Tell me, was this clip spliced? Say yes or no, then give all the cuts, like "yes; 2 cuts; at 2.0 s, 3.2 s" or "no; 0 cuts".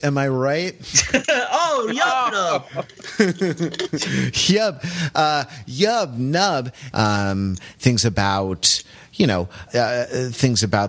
yes; 2 cuts; at 6.9 s, 9.7 s